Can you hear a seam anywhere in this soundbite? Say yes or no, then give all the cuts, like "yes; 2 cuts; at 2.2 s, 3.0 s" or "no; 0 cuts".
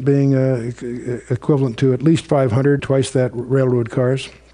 yes; 1 cut; at 2.8 s